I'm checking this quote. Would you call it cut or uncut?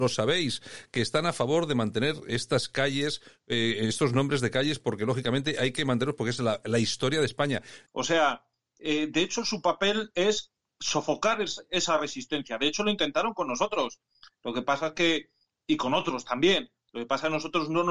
cut